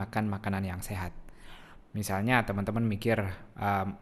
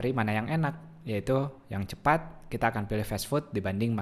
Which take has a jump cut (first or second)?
first